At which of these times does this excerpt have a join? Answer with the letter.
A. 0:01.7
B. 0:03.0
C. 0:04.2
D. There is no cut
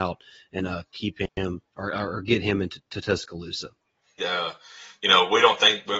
C